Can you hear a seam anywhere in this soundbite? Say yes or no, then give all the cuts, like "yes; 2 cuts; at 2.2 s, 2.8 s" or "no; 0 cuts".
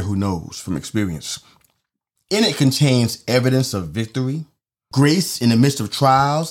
yes; 2 cuts; at 2.2 s, 4.9 s